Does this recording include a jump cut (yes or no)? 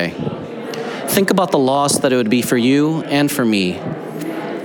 no